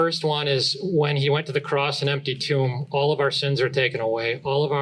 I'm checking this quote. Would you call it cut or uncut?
uncut